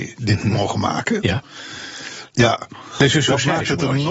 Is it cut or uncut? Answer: cut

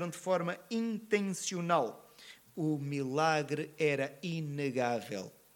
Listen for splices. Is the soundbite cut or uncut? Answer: cut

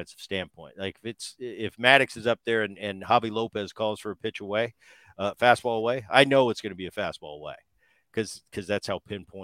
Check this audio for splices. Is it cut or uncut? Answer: uncut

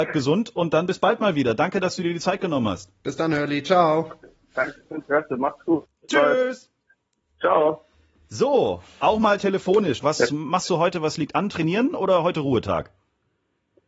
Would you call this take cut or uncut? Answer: cut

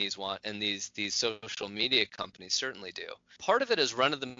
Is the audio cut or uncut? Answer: cut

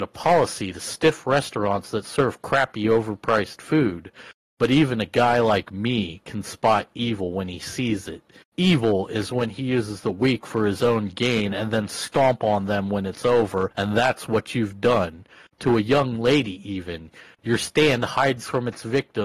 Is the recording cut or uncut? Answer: uncut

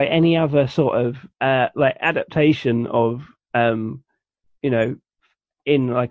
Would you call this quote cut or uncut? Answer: cut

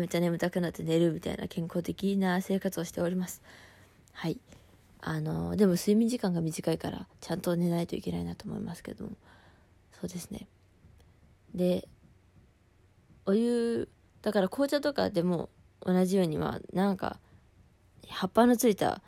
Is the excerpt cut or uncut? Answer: uncut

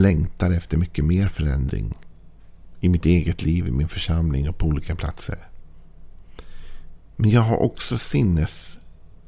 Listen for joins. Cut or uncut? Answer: uncut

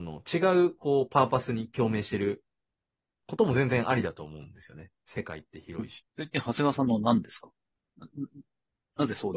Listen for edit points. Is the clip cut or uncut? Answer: cut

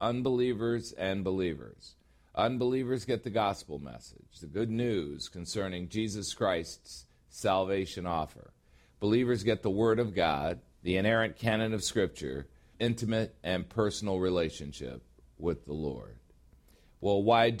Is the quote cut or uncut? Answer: cut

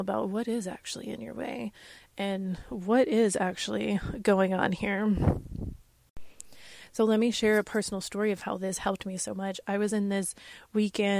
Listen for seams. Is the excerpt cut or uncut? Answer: uncut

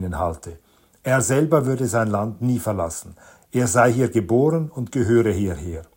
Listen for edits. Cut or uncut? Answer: uncut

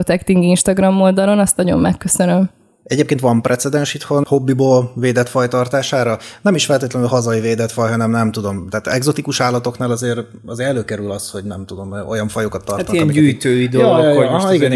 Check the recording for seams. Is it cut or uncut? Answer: uncut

